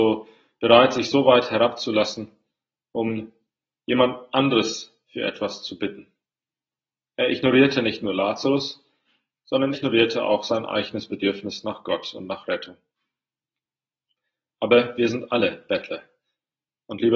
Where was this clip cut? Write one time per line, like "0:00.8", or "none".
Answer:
0:09.7